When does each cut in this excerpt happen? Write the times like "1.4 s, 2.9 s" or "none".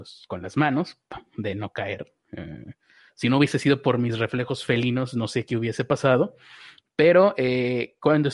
none